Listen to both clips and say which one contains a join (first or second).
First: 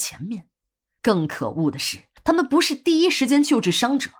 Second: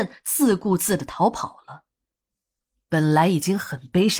first